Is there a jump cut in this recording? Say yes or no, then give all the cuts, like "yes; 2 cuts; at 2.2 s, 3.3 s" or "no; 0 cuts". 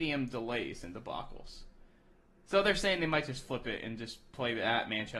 yes; 1 cut; at 2.5 s